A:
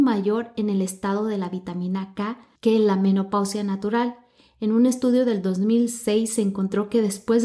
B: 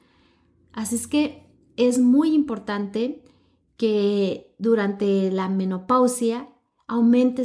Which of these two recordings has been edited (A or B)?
A